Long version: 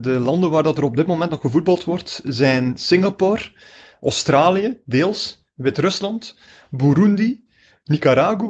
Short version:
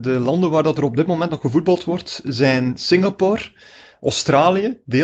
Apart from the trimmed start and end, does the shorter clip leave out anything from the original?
no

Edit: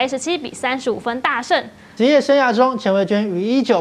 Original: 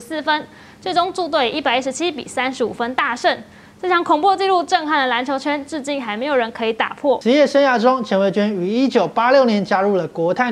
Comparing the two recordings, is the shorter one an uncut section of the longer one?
no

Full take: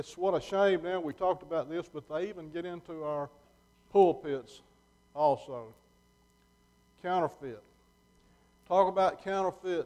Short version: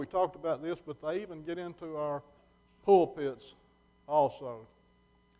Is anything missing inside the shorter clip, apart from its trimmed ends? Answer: no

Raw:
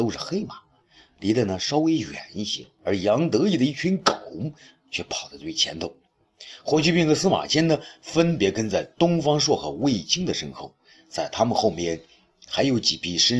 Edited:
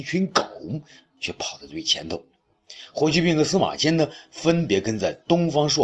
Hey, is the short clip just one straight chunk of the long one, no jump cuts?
yes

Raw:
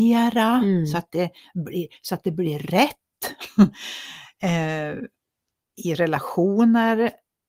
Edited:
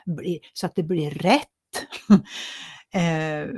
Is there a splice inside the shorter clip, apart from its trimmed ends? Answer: no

